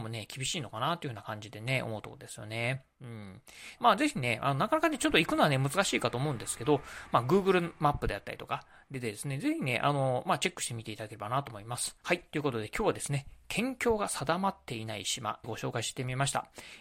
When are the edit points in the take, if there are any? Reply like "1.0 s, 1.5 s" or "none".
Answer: 3.8 s, 12.0 s, 15.4 s